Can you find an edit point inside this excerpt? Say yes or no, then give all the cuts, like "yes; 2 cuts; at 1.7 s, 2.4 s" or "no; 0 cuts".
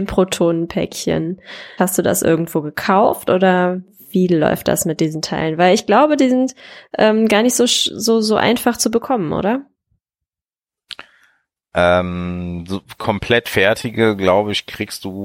yes; 1 cut; at 1.8 s